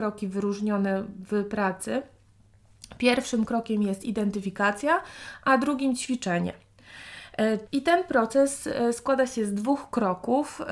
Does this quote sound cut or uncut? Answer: cut